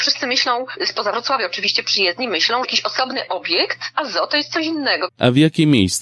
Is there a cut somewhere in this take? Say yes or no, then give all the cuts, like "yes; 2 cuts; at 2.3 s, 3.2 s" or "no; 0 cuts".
yes; 2 cuts; at 2.6 s, 5.1 s